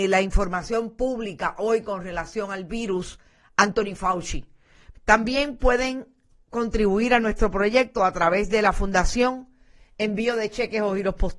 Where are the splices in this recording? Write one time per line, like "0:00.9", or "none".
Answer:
0:04.9